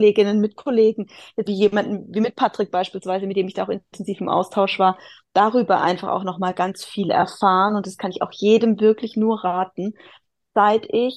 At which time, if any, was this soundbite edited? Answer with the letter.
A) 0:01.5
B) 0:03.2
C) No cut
A